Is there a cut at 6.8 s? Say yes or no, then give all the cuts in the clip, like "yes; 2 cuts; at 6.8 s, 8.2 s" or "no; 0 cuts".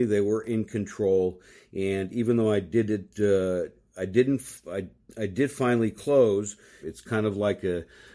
yes; 1 cut; at 6.8 s